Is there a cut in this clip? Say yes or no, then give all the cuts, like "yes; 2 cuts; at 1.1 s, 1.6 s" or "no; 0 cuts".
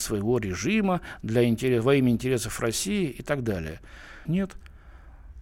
yes; 1 cut; at 4.3 s